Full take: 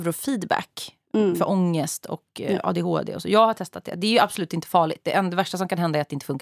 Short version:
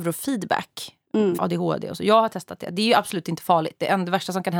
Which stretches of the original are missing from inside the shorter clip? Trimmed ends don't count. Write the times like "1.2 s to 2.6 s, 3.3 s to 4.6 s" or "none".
1.4 s to 2.6 s